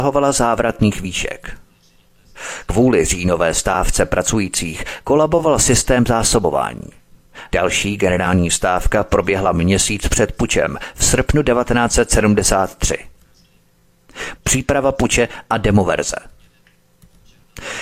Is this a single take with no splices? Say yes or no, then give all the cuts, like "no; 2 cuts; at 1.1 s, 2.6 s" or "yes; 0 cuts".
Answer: no; 2 cuts; at 7.5 s, 14.3 s